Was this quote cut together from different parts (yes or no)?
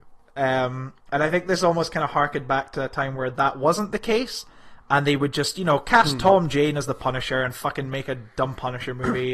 no